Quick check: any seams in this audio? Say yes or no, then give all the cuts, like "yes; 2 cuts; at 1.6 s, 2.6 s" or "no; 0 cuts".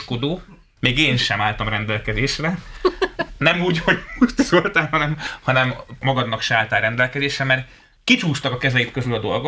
no; 0 cuts